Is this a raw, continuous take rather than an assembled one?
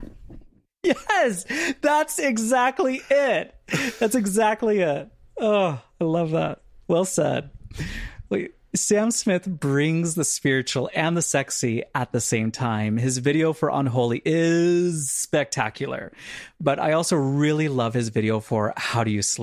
yes; 0 cuts

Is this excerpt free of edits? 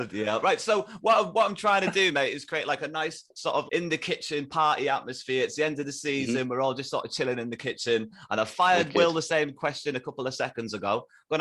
no; 1 cut; at 3.7 s

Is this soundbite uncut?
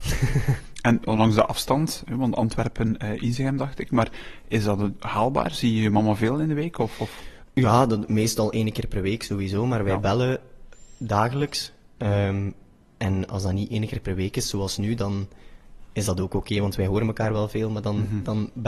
yes; 0 cuts

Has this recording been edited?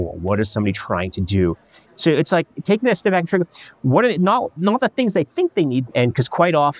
yes; 2 cuts; at 1.9 s, 5.9 s

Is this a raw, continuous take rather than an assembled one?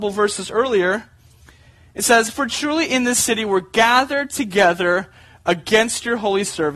yes; 0 cuts

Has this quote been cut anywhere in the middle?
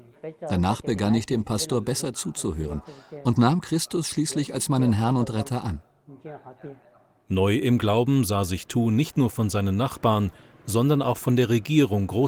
no; 0 cuts

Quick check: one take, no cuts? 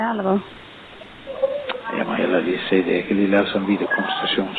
yes; 0 cuts

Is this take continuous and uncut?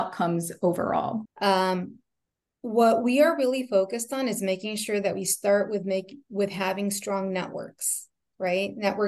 no; 1 cut; at 1.3 s

